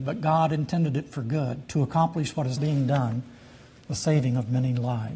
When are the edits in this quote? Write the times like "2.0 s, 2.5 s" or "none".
2.6 s

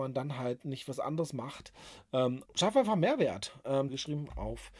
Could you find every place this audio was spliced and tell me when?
2.5 s, 3.9 s

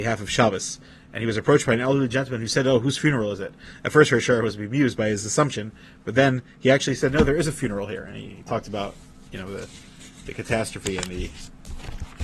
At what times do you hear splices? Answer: none

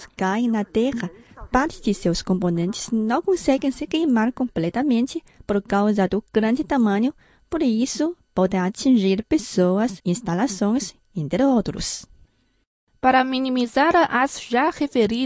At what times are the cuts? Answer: 10.0 s

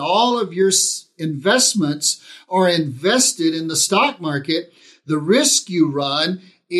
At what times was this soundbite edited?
none

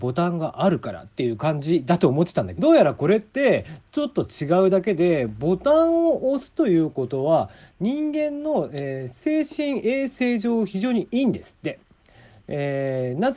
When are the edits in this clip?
2.6 s

